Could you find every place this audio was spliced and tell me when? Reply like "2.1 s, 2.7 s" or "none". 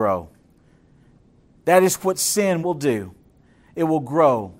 2.6 s